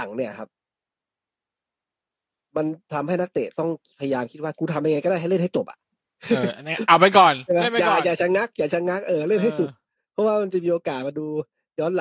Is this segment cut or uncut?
uncut